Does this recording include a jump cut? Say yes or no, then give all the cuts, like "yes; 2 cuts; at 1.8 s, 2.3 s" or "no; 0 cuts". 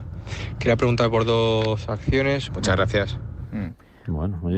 yes; 1 cut; at 2.5 s